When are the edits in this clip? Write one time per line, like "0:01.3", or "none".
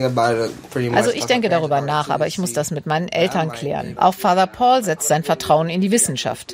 0:04.0

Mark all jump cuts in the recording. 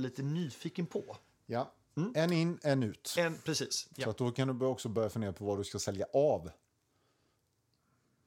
0:03.9

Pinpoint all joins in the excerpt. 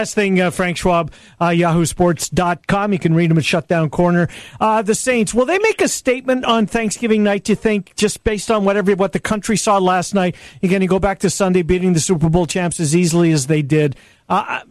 none

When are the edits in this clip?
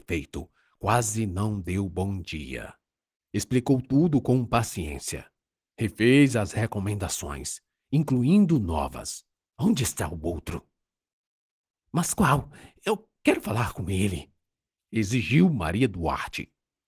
0:03.2
0:09.5
0:11.7

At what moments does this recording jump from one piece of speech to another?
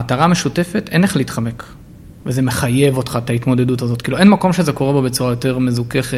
0:02.2

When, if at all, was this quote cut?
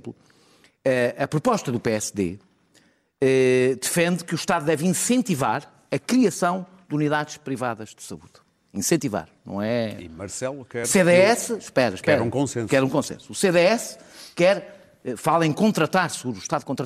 none

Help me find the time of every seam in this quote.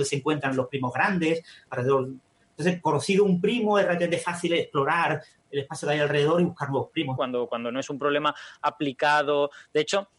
0:07.2

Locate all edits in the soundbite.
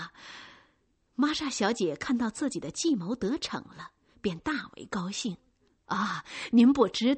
none

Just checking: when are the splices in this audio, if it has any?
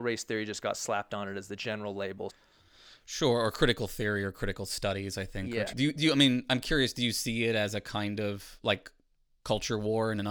0:02.3
0:05.7

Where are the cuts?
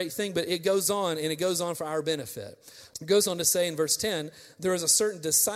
0:02.9

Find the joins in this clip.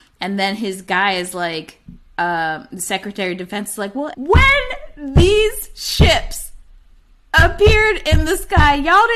0:04.1

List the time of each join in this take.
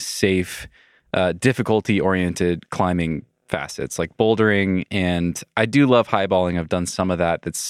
none

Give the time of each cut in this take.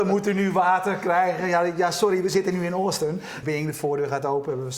0:03.4

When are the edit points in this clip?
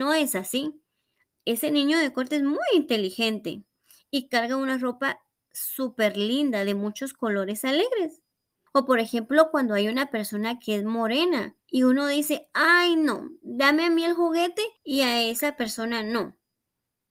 0:08.7
0:11.6
0:14.8

